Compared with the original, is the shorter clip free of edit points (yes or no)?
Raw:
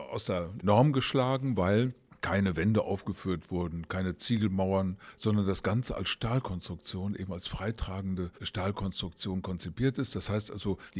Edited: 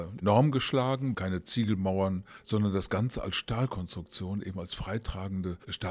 no